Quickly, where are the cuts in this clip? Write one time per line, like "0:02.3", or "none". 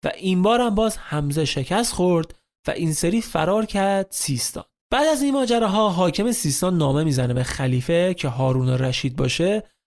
0:04.8